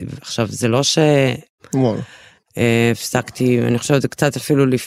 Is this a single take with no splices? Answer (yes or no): no